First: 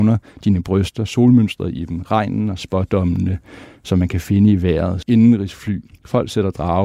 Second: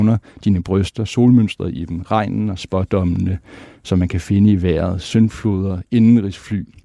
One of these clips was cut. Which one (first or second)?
first